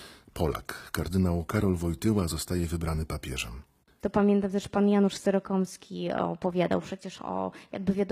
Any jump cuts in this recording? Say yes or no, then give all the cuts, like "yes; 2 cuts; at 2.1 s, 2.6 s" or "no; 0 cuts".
yes; 1 cut; at 4.0 s